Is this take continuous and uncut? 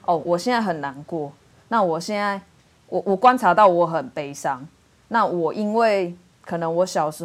yes; 0 cuts

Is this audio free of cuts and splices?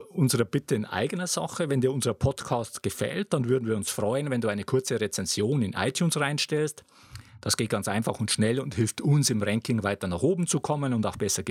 yes; 0 cuts

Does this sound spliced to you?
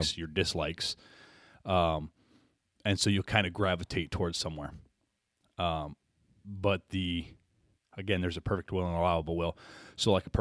no; 0 cuts

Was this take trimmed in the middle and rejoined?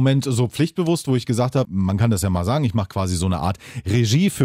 yes; 1 cut; at 1.6 s

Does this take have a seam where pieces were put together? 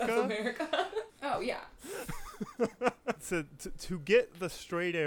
yes; 1 cut; at 1.1 s

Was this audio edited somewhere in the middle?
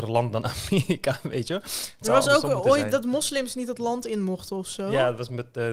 no; 0 cuts

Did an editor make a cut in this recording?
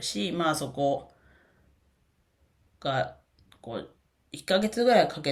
no; 0 cuts

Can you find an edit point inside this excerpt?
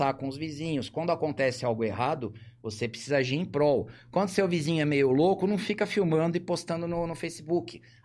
no; 0 cuts

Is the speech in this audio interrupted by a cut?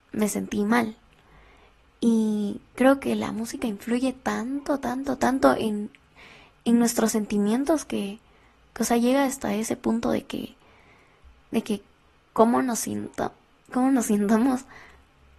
no; 0 cuts

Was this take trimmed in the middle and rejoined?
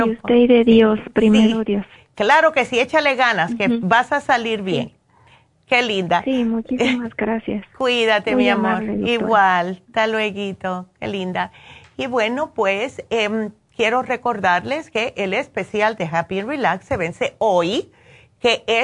no; 0 cuts

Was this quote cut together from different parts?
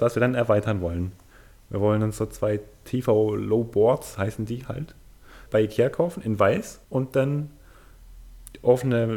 yes; 2 cuts; at 5.5 s, 6.8 s

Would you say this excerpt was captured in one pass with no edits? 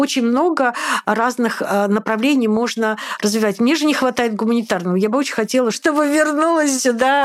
no; 1 cut; at 5.7 s

